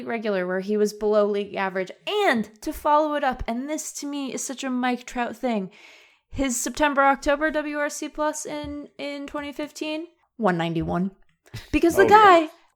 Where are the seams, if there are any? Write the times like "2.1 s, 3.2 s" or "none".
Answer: none